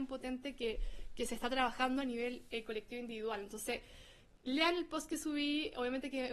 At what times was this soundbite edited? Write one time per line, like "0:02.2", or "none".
none